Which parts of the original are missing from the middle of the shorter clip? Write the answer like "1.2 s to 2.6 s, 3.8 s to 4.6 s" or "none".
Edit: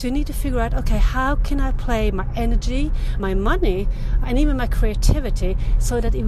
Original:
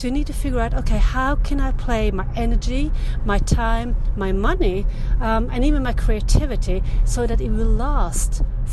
3.2 s to 4.2 s, 5.2 s to 5.5 s